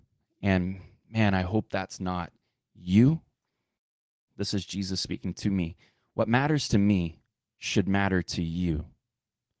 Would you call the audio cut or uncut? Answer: uncut